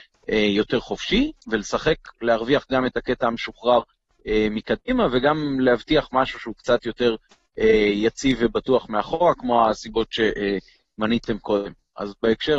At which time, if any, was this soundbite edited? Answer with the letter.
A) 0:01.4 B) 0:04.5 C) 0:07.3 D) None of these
D